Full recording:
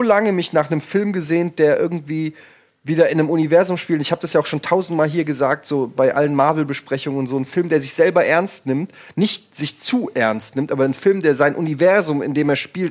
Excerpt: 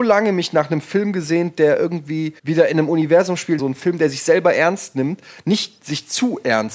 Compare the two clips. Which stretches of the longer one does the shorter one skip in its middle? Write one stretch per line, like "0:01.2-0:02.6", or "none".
0:02.4-0:02.8
0:04.0-0:07.3